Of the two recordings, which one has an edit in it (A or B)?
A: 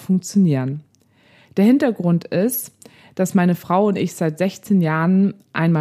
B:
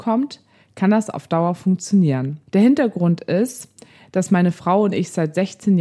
B